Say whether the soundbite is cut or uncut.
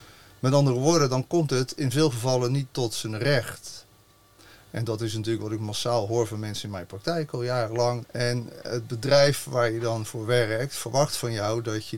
cut